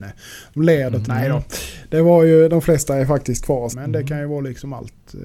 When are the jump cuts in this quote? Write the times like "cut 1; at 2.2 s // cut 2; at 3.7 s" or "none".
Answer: cut 1; at 1.0 s // cut 2; at 3.7 s